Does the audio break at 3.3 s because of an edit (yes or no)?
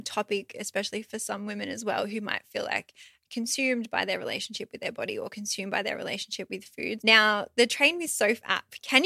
no